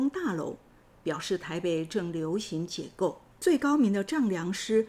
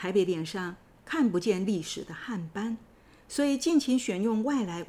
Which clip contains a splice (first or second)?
first